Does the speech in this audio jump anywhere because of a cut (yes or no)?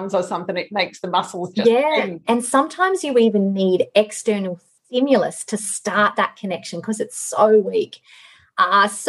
yes